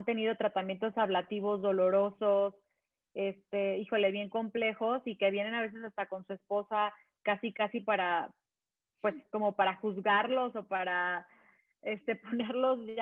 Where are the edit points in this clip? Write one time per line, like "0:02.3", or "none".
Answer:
none